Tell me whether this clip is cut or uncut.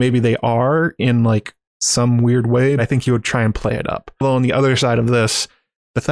cut